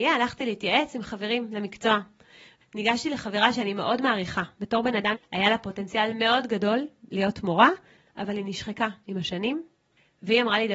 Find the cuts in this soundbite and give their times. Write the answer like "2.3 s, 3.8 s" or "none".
5.1 s